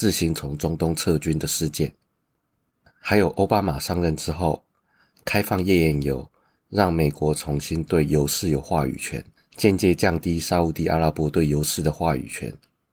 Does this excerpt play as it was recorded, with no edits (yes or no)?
yes